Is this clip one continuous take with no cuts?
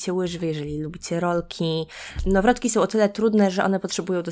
yes; 0 cuts

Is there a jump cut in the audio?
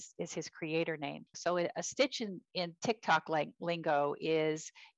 yes; 1 cut; at 1.3 s

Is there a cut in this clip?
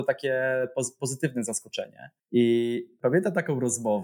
yes; 1 cut; at 2.2 s

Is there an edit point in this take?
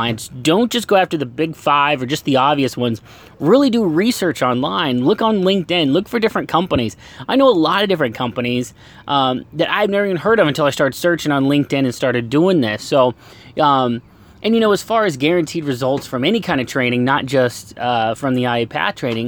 no; 0 cuts

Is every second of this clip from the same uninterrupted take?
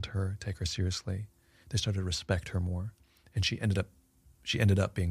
yes; 0 cuts

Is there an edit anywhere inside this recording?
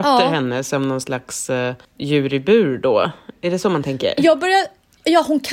yes; 1 cut; at 1.8 s

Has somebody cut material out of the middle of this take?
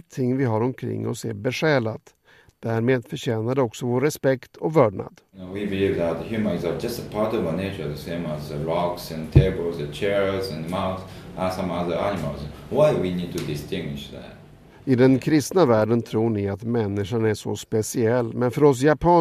no; 0 cuts

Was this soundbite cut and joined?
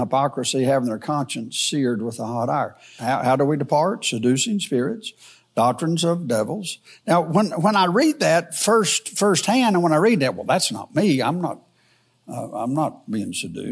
yes; 1 cut; at 3.0 s

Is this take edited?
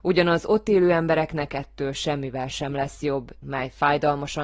yes; 1 cut; at 3.4 s

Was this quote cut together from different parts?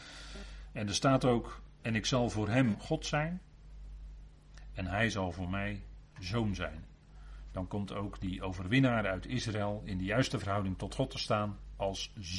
no; 0 cuts

